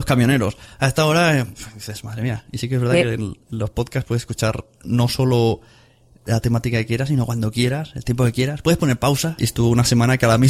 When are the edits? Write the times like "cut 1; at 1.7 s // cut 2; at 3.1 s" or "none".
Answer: cut 1; at 9.4 s